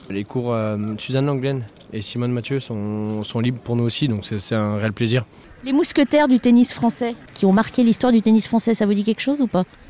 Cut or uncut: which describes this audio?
uncut